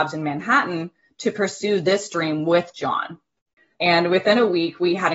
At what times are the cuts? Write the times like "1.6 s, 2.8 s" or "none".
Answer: 3.7 s